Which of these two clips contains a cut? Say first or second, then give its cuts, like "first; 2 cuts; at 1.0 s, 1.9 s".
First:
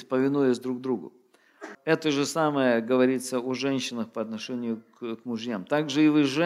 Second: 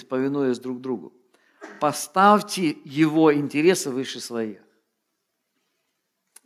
first; 1 cut; at 1.7 s